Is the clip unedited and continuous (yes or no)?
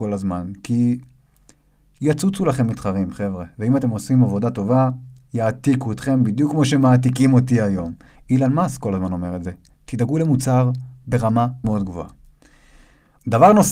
no